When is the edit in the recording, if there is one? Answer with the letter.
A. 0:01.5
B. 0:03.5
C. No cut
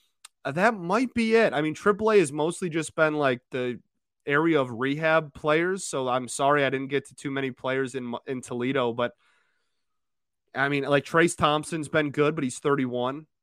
B